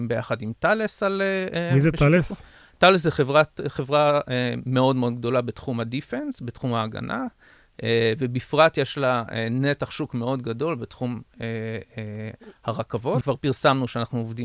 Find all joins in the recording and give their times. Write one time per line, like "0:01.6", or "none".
0:13.2